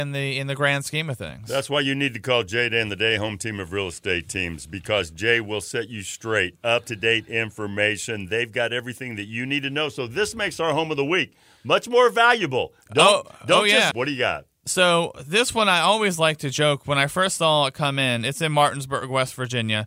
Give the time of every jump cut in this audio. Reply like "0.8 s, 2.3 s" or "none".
13.9 s